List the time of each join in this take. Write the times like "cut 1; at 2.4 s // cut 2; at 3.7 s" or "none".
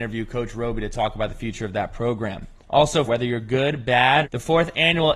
cut 1; at 3.0 s // cut 2; at 4.2 s

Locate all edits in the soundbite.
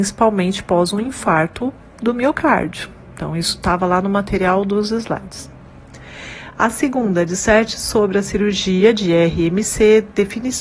none

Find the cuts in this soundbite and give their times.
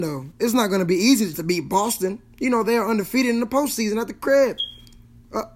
cut 1; at 1.3 s

